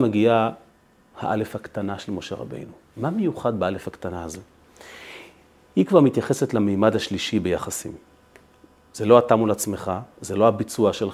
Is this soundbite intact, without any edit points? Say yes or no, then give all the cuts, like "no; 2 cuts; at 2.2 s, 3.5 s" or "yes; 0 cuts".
yes; 0 cuts